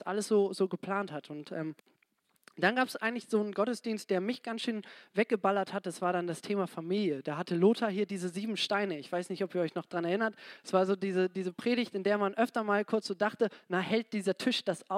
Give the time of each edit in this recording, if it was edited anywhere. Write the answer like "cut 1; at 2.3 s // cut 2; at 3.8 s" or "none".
none